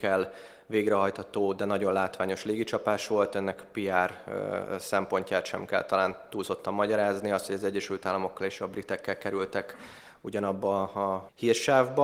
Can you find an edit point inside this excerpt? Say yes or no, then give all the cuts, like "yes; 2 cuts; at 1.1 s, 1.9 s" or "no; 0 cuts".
no; 0 cuts